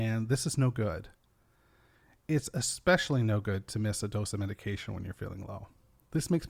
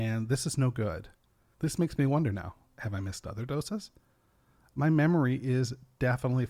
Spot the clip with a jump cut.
second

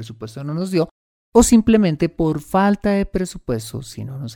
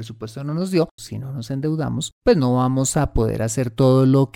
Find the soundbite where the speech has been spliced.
second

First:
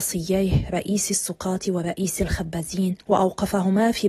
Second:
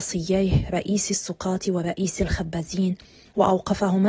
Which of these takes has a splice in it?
first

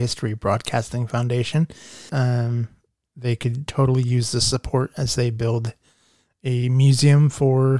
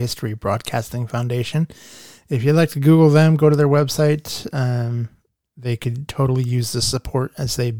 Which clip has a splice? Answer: first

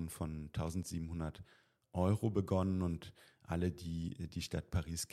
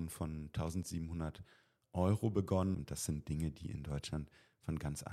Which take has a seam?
second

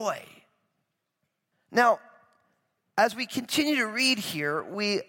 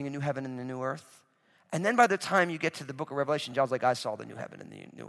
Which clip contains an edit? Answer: first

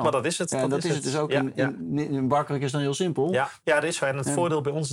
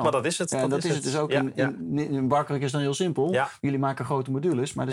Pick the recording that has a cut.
first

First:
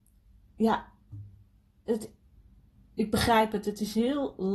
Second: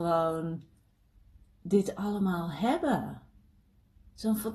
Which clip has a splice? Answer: first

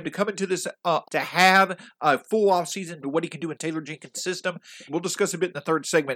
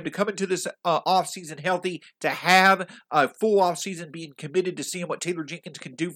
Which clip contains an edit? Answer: first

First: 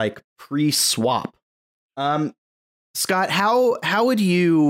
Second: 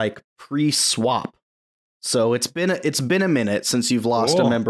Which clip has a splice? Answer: first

